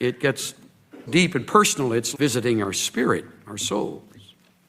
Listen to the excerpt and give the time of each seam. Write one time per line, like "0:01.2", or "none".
0:01.1
0:02.1